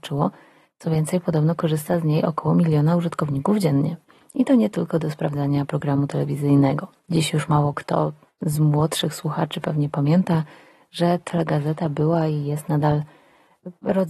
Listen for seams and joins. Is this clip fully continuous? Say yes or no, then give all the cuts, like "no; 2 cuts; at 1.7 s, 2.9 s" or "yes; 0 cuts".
yes; 0 cuts